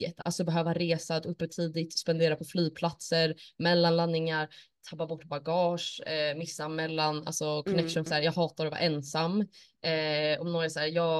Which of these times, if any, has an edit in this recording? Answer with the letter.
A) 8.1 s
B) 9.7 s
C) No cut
A